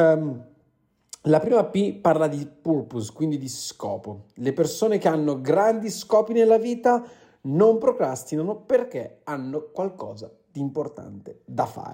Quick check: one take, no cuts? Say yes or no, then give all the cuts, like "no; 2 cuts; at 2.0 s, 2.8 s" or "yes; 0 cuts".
yes; 0 cuts